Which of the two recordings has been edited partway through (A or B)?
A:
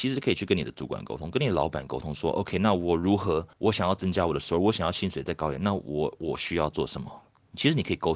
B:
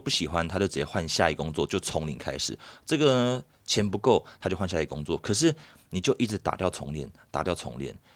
A